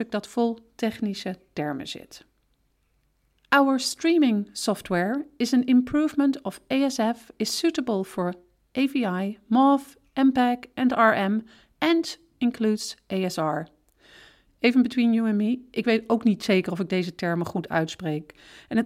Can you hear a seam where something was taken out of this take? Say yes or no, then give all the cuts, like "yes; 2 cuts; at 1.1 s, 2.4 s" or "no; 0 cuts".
no; 0 cuts